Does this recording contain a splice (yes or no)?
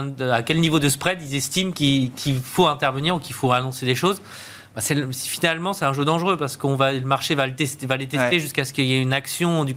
no